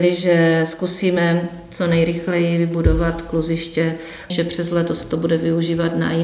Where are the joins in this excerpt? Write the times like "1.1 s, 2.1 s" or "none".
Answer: 4.3 s